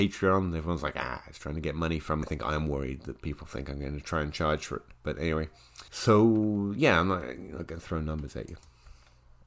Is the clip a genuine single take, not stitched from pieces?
no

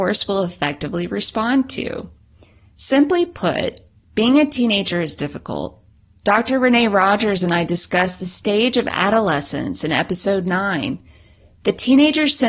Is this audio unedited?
yes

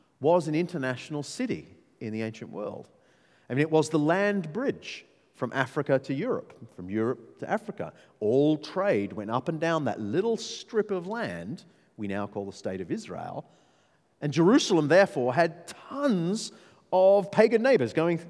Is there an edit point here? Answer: no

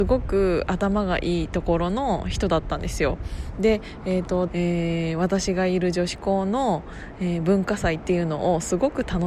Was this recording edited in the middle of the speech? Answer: yes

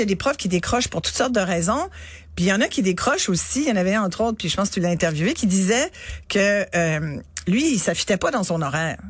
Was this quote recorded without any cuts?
yes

